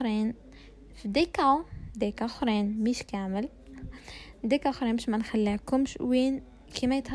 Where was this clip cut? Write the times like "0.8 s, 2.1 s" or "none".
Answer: none